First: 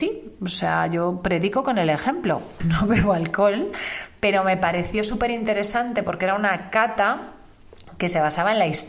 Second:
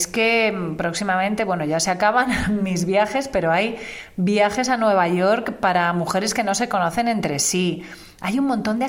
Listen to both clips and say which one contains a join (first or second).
first